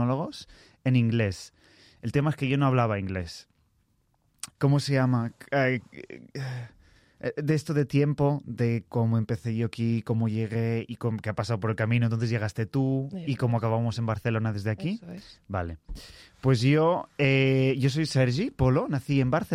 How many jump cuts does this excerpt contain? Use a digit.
1